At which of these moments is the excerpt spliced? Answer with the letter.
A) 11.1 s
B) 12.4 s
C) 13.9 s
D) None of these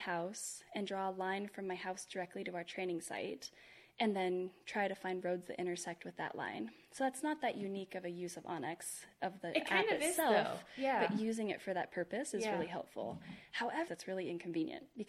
C